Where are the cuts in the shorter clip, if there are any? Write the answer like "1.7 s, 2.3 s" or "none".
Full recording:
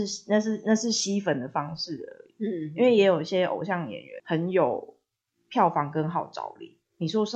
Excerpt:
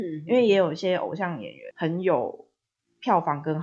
none